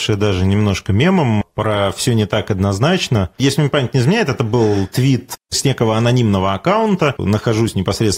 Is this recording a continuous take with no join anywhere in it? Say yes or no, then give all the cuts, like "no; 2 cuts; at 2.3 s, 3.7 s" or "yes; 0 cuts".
no; 1 cut; at 7.2 s